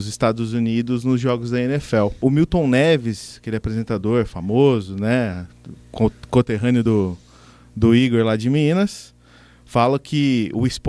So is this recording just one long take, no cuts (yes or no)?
yes